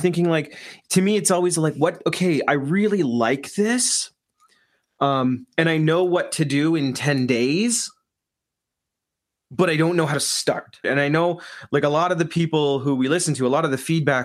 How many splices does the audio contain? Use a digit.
1